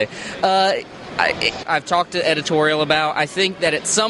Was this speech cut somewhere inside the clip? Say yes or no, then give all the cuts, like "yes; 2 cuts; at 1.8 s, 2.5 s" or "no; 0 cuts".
yes; 1 cut; at 1.6 s